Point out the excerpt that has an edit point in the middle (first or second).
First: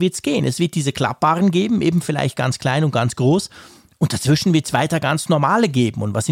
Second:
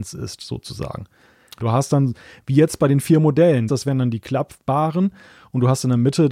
second